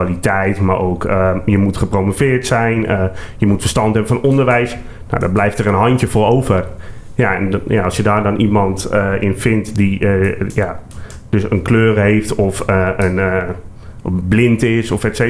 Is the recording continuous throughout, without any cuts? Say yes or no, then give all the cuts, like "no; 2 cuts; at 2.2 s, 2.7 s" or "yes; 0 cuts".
yes; 0 cuts